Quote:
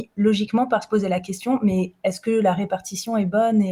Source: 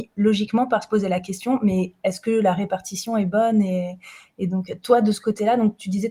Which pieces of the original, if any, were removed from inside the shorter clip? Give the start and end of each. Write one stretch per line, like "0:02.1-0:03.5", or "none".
none